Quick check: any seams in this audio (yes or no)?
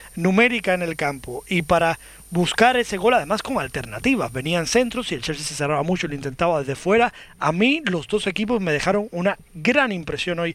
no